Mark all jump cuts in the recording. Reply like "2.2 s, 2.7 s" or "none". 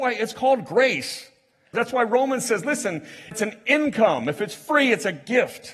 1.7 s, 3.3 s

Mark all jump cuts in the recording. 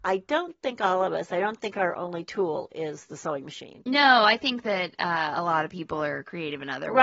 none

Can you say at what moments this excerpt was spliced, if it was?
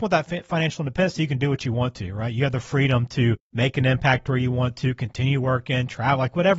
none

